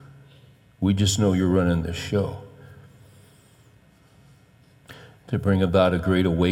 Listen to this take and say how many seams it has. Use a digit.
1